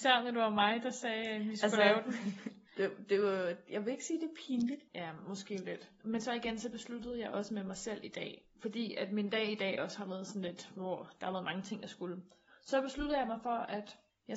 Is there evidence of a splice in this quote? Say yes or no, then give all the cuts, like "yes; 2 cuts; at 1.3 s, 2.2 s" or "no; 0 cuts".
yes; 1 cut; at 4.9 s